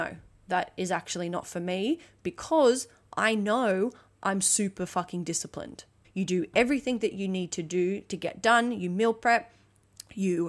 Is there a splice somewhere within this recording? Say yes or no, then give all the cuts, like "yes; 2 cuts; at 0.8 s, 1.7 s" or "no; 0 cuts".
yes; 1 cut; at 6.0 s